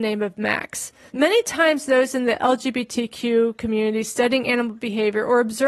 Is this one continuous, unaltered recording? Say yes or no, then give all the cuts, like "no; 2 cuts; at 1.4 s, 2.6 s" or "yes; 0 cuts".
no; 1 cut; at 1.1 s